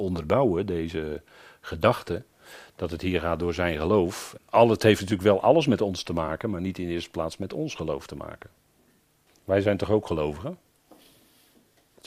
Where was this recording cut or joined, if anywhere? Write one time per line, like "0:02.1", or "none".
0:04.4
0:09.3